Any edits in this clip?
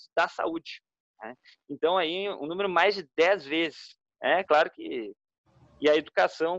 no; 0 cuts

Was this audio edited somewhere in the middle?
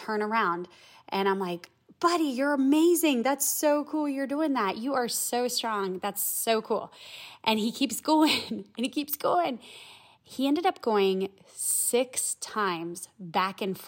no; 0 cuts

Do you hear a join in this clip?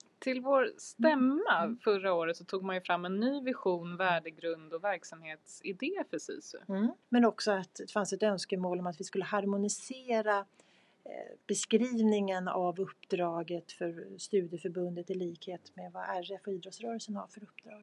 yes; 2 cuts; at 7.0 s, 11.4 s

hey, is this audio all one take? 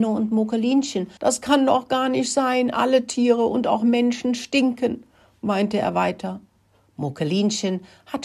no; 1 cut; at 1.2 s

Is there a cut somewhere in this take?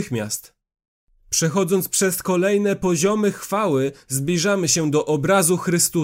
no; 0 cuts

